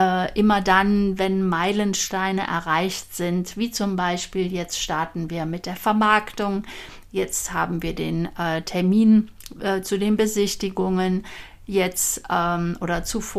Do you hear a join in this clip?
no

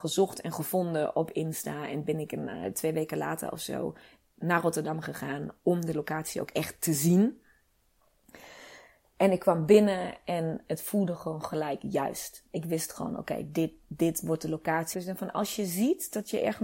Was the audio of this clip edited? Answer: yes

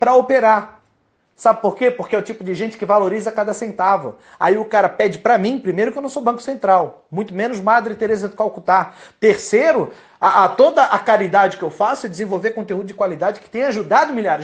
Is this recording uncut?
yes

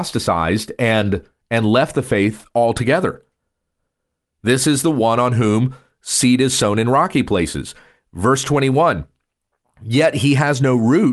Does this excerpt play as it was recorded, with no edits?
yes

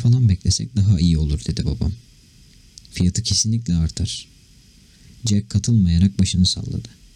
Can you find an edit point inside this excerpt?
no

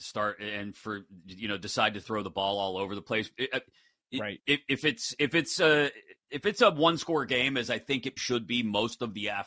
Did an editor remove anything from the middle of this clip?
yes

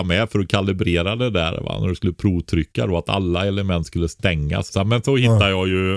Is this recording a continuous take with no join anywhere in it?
no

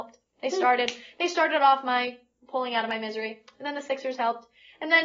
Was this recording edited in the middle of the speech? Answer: no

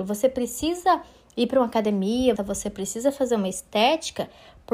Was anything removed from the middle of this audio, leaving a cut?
yes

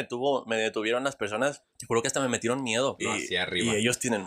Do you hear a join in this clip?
yes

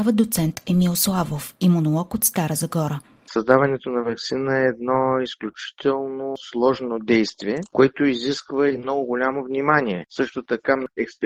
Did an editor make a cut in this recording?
no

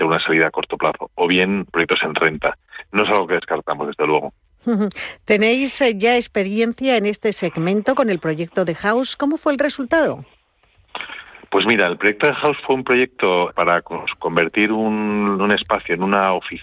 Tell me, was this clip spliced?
yes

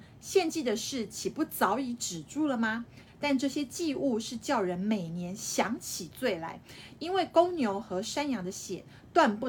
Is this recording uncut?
no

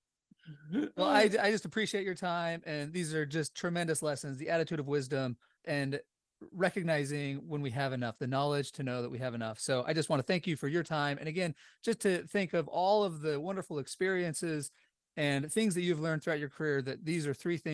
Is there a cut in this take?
yes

